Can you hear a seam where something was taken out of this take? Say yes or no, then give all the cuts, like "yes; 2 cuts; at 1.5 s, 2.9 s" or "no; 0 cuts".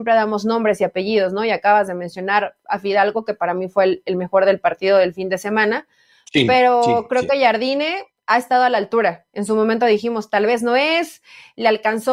no; 0 cuts